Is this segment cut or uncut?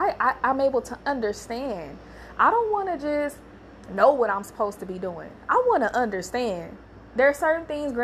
uncut